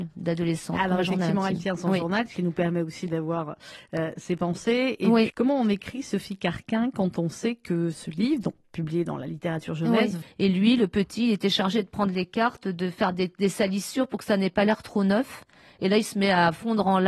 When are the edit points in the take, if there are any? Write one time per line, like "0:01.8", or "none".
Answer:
0:05.3
0:10.2